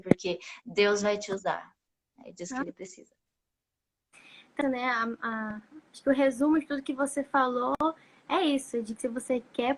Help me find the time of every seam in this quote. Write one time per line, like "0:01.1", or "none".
0:04.6
0:05.9